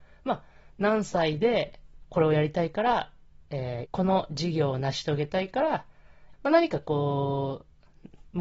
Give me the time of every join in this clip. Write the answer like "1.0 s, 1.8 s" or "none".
3.8 s, 6.3 s